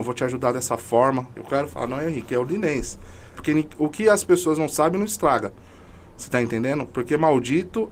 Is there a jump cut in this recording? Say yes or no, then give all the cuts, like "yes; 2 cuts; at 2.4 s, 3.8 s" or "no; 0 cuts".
yes; 2 cuts; at 1.3 s, 3.4 s